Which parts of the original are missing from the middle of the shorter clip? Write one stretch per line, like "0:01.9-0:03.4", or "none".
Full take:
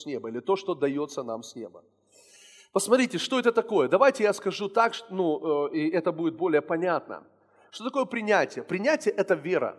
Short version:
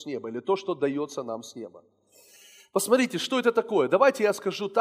none